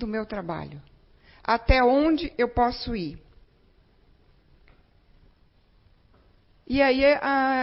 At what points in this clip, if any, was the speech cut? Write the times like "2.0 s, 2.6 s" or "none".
none